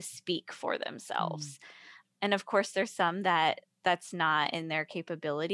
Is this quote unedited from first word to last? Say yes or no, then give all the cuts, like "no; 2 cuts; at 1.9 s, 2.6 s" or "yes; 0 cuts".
yes; 0 cuts